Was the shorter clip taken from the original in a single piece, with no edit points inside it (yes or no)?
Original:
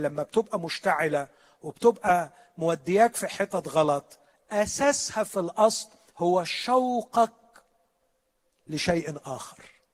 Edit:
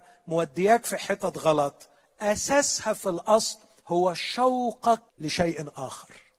no